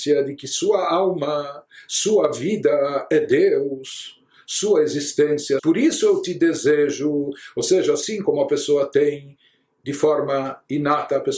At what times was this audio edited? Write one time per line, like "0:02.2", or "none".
0:05.6